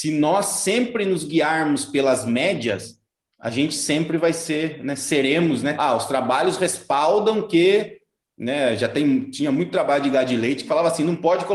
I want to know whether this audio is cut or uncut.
cut